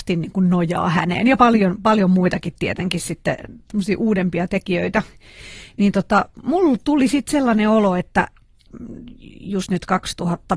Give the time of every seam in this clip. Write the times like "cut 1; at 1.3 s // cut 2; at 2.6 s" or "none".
none